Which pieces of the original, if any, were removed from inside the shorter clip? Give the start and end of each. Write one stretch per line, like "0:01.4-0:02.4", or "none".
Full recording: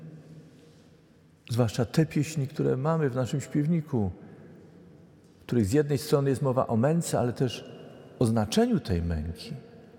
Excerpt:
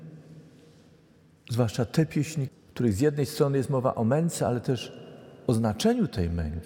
0:02.5-0:05.2